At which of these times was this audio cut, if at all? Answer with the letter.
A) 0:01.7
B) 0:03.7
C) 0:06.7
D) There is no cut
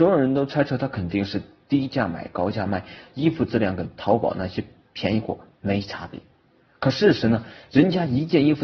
D